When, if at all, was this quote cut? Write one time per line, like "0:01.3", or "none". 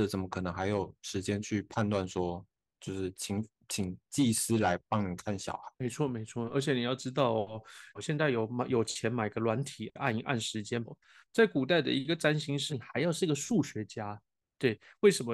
0:07.9
0:10.9
0:12.7